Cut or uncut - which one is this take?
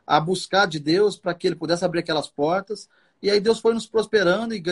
uncut